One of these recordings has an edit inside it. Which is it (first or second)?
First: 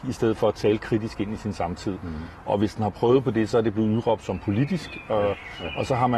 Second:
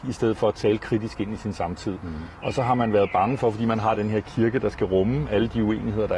second